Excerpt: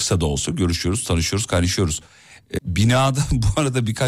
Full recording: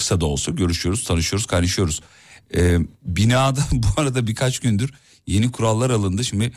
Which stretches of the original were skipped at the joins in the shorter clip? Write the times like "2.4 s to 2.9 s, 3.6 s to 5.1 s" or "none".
2.6 s to 3.0 s